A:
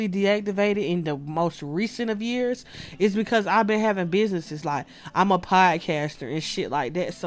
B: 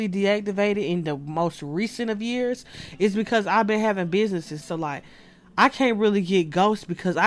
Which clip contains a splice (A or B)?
B